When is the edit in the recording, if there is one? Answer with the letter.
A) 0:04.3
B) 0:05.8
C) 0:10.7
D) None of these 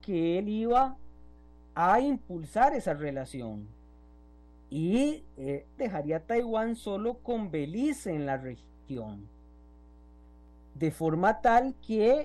B